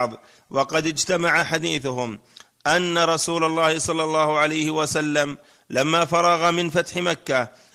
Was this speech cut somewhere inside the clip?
no; 0 cuts

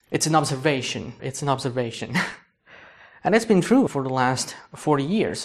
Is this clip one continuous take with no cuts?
no; 2 cuts; at 1.2 s, 3.9 s

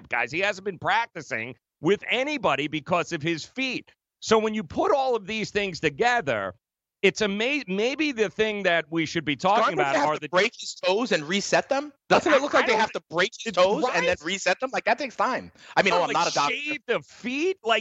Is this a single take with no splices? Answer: no; 2 cuts; at 12.0 s, 15.9 s

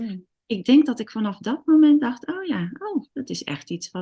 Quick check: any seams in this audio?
yes; 1 cut; at 3.1 s

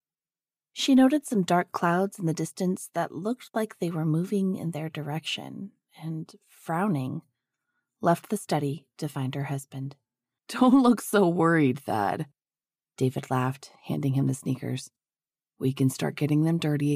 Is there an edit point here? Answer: yes; 1 cut; at 10.4 s

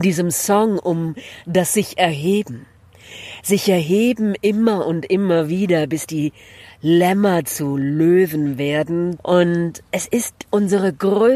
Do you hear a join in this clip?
yes; 1 cut; at 9.2 s

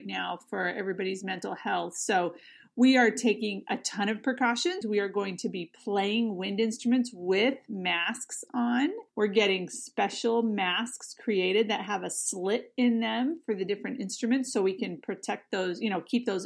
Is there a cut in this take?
yes; 2 cuts; at 4.8 s, 9.1 s

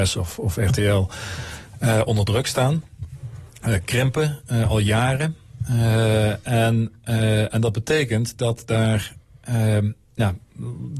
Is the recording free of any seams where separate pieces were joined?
yes; 0 cuts

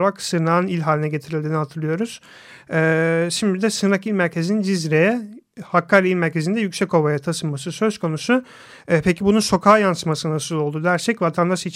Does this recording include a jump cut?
no; 0 cuts

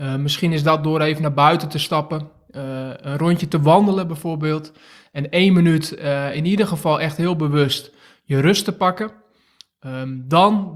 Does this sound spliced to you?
no; 0 cuts

